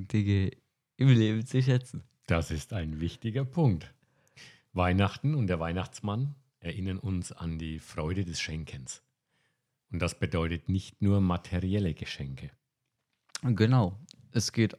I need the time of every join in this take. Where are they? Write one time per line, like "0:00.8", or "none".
none